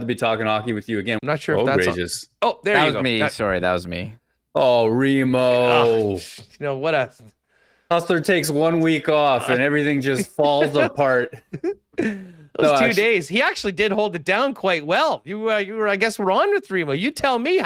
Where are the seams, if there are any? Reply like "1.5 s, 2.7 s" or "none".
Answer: 1.2 s